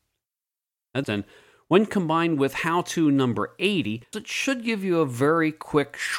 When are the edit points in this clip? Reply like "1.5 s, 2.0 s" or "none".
1.0 s, 4.1 s